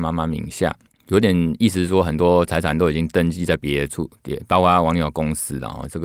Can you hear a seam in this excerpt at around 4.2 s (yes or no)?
no